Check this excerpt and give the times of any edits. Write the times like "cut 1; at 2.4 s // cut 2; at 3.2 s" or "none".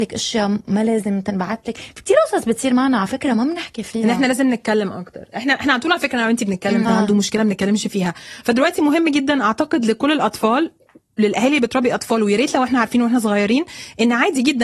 cut 1; at 6.8 s